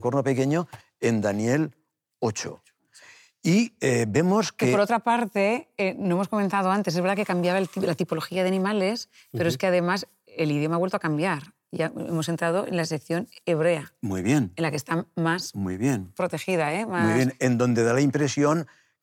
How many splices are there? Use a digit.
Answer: 0